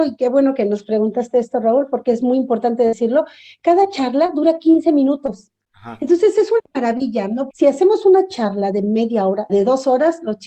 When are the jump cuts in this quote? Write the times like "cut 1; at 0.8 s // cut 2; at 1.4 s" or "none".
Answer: cut 1; at 7.5 s // cut 2; at 9.5 s